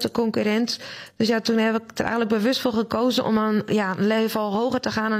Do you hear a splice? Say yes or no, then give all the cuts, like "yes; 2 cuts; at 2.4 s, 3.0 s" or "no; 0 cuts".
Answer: no; 0 cuts